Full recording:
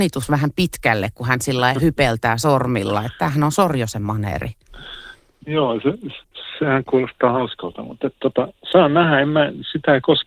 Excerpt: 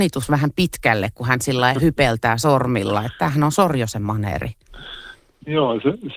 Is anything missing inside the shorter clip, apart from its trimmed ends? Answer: no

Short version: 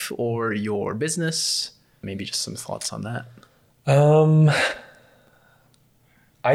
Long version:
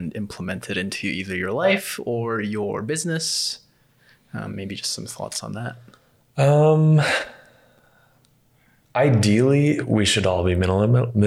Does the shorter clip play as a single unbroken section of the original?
no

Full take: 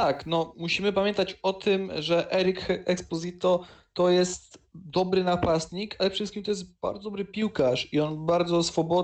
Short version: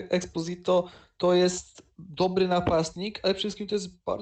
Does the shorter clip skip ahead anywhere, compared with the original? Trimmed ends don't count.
no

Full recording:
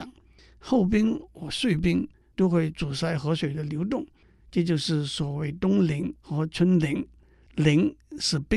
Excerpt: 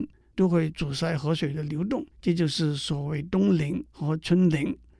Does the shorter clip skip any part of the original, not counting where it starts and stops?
yes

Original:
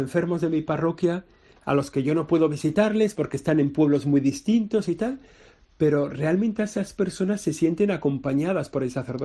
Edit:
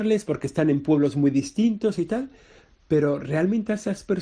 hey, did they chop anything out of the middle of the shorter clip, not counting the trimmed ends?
no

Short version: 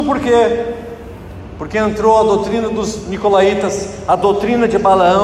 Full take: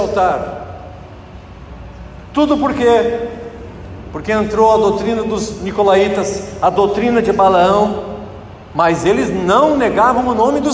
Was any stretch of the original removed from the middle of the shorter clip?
no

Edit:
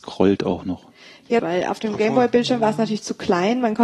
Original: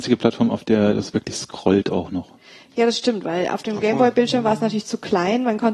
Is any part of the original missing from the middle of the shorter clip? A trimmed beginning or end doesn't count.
yes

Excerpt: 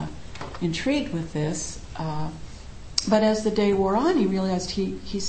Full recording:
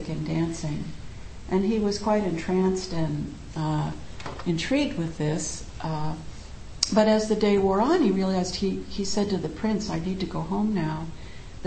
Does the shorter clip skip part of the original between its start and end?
no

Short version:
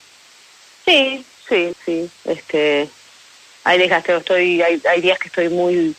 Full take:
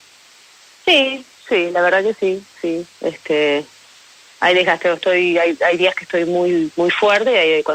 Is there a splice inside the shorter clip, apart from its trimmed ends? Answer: yes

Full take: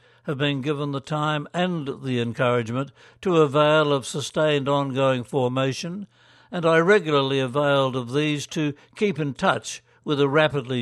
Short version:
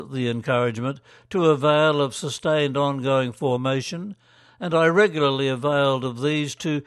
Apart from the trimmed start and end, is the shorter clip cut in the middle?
no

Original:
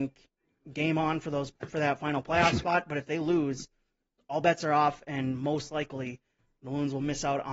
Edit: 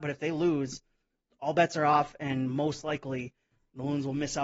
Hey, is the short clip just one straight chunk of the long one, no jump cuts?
yes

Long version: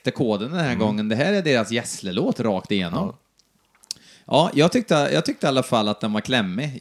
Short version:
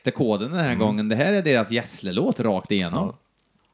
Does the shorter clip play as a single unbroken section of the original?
yes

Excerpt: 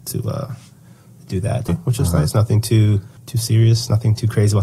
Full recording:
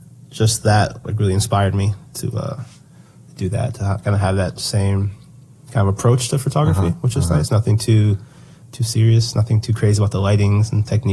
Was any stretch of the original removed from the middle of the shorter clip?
yes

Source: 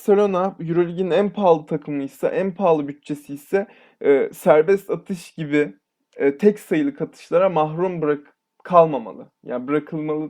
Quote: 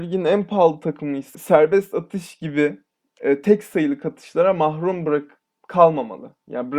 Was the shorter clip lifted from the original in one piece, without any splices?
no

